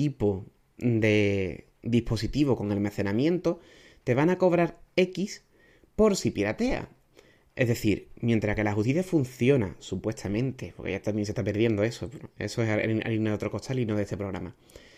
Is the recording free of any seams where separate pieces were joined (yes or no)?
yes